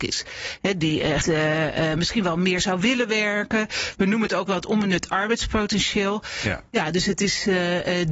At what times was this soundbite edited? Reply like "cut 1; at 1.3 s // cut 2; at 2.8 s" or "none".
cut 1; at 1.2 s